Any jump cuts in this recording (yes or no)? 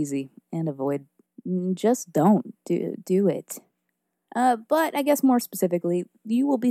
yes